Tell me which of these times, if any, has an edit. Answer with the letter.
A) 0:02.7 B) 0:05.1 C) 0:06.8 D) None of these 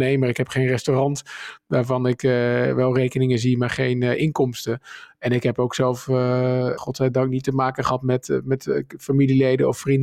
C